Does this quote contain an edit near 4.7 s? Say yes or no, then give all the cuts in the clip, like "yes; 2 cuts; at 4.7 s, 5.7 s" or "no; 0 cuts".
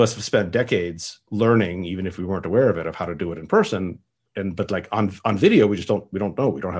no; 1 cut; at 1.3 s